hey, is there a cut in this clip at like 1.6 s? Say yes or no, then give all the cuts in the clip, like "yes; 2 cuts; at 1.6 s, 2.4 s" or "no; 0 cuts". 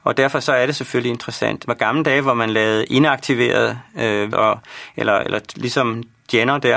yes; 2 cuts; at 1.6 s, 4.3 s